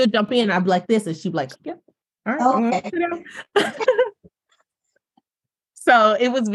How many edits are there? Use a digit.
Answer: 1